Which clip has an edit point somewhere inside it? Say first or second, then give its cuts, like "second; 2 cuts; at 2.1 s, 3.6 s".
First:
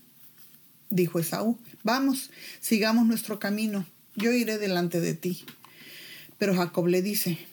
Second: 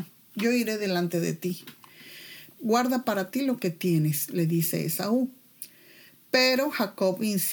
second; 1 cut; at 2.5 s